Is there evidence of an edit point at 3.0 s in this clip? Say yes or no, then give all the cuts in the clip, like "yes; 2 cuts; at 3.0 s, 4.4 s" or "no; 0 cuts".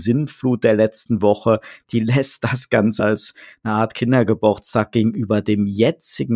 yes; 1 cut; at 3.0 s